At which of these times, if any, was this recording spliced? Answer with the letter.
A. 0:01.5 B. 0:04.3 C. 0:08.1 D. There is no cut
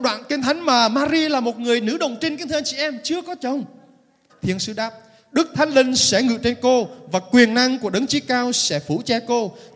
B